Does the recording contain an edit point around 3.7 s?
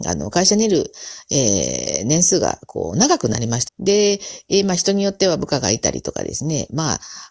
yes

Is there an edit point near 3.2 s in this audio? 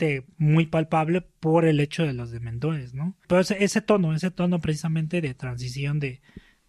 yes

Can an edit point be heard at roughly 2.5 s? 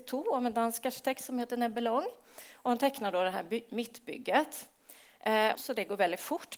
no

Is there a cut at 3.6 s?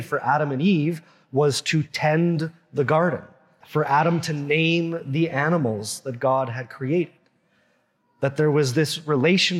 yes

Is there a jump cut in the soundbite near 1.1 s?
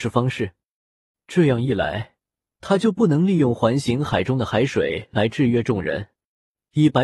yes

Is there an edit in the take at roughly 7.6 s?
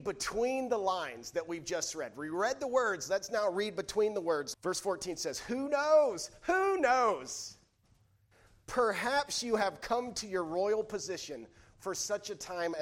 no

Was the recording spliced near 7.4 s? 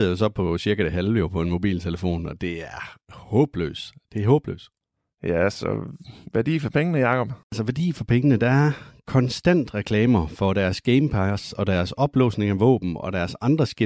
yes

